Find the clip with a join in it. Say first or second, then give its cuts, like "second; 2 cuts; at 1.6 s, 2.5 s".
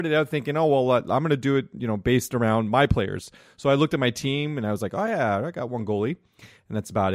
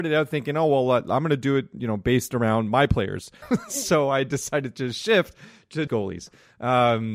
second; 2 cuts; at 3.4 s, 5.9 s